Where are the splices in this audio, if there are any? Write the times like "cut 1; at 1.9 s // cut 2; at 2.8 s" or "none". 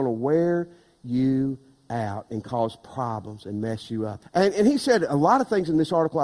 cut 1; at 4.2 s